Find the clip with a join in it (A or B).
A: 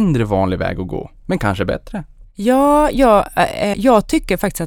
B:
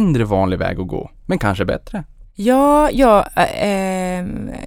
A